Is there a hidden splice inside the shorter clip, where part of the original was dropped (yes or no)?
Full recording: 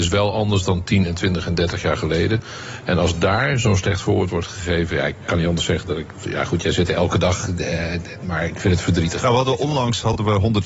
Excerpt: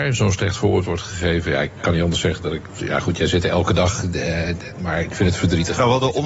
no